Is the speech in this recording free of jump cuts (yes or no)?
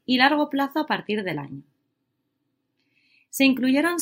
yes